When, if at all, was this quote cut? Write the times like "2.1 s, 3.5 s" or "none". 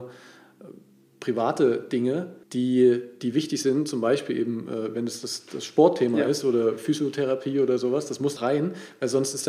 2.4 s, 8.4 s